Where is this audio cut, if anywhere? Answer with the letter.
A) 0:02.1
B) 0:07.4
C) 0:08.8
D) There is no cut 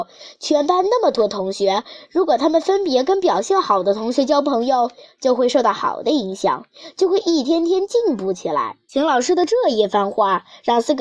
D